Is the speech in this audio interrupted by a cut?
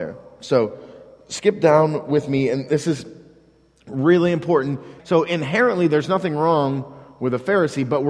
yes; 1 cut; at 5.0 s

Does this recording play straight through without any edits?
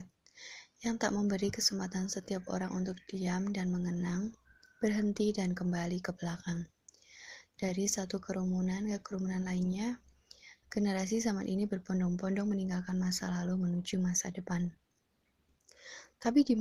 no; 1 cut; at 10.6 s

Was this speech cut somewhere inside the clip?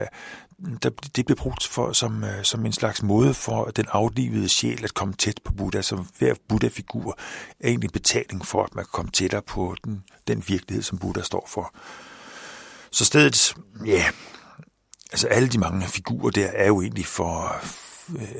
no; 0 cuts

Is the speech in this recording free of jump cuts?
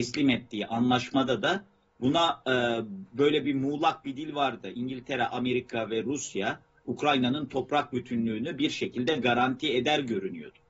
yes; 0 cuts

